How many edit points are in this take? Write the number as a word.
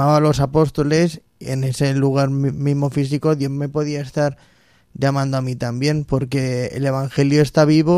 zero